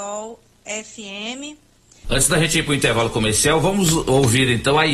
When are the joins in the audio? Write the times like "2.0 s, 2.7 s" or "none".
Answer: 2.0 s